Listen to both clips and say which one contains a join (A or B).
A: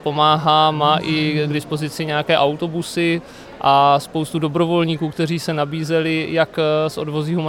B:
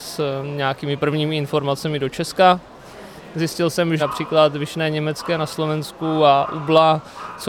B